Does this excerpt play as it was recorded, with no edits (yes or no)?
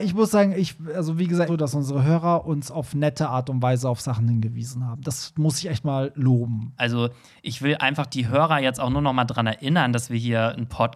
no